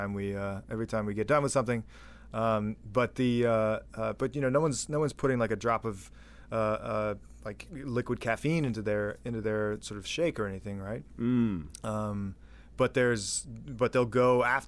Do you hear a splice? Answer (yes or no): no